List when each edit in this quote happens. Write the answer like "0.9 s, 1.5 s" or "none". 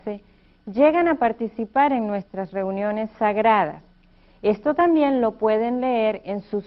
none